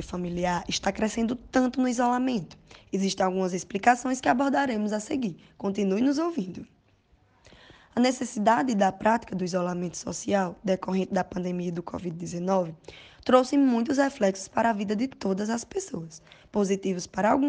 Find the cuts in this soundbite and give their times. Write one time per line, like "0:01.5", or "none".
none